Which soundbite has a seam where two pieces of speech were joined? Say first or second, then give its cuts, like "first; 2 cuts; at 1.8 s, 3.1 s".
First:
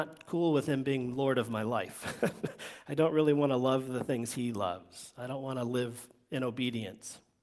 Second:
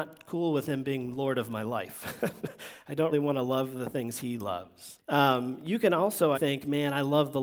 second; 3 cuts; at 3.1 s, 5.0 s, 6.3 s